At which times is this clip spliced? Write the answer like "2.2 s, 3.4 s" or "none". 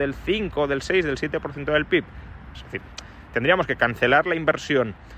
2.5 s